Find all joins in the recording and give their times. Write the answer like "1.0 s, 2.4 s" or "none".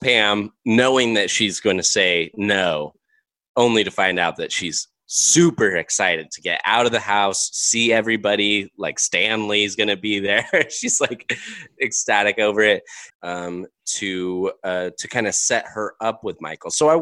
13.1 s